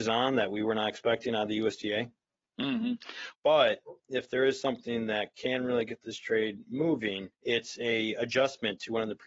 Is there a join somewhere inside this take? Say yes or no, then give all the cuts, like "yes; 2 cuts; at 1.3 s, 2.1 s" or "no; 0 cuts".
yes; 2 cuts; at 3.3 s, 7.3 s